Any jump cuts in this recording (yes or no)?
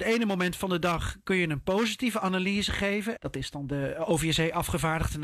yes